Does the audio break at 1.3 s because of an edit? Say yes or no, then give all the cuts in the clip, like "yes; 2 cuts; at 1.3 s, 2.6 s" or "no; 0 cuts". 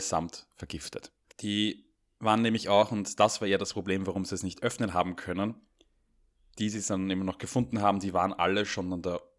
yes; 1 cut; at 1.3 s